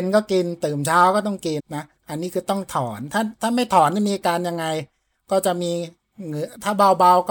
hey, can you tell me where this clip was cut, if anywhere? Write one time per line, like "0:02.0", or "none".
0:01.6

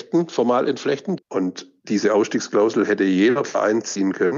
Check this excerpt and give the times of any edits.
0:01.2

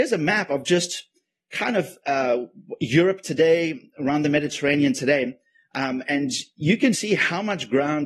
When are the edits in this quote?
0:06.9

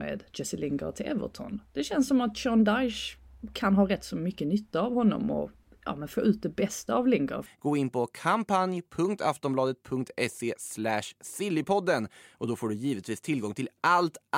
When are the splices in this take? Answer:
0:07.5

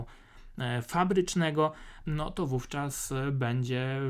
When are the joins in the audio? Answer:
0:02.0

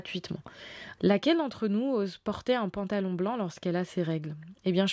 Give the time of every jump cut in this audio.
0:01.0

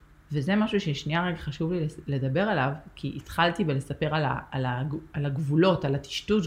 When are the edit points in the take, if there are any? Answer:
none

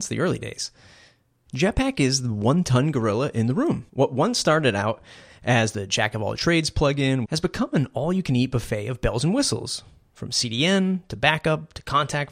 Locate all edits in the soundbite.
0:01.5
0:03.9
0:07.2

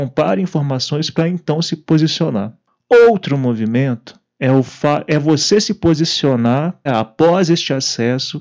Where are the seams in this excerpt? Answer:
0:06.9

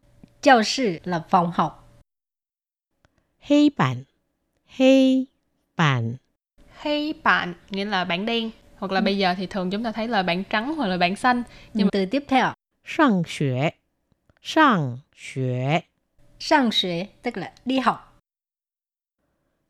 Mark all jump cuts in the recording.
0:11.9
0:15.1

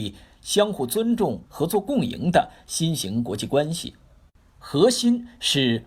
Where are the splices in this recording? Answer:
0:01.5

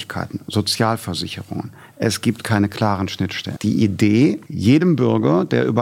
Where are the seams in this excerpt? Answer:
0:03.6

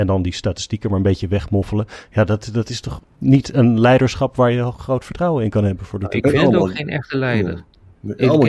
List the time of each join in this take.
none

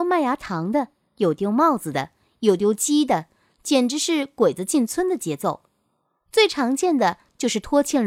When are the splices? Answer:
none

